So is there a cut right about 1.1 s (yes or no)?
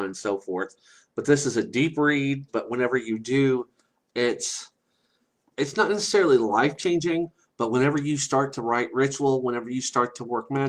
no